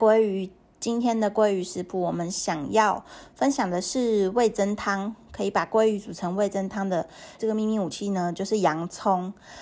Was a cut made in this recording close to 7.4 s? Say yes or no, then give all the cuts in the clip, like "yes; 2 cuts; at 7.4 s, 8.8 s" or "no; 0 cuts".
yes; 1 cut; at 7.4 s